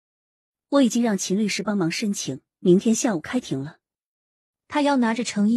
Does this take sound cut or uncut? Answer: uncut